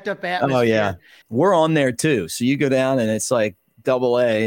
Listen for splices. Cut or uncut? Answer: cut